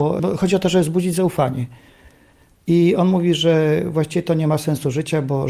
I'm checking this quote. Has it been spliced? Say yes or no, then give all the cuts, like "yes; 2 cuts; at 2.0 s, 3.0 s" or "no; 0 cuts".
no; 0 cuts